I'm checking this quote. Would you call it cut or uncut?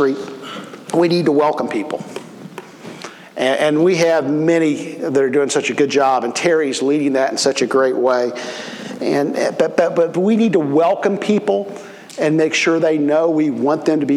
uncut